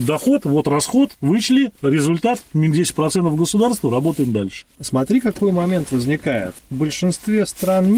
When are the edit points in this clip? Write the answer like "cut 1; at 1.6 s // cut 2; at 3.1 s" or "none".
none